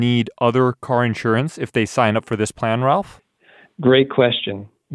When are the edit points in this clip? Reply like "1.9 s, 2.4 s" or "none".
none